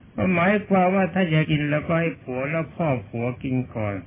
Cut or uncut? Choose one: cut